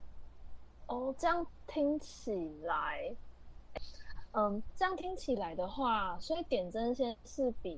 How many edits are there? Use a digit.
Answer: 0